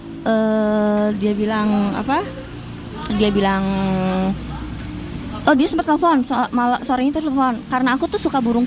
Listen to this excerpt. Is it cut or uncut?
uncut